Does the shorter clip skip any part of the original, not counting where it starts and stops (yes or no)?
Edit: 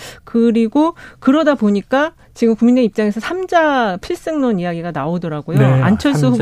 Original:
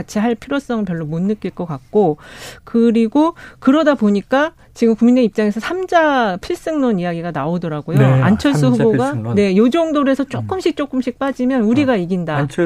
no